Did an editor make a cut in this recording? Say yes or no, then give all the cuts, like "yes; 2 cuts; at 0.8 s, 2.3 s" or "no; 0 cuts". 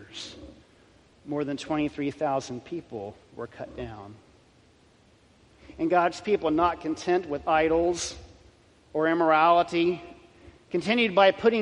no; 0 cuts